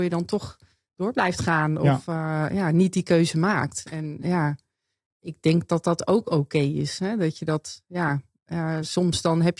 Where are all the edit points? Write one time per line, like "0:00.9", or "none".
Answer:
none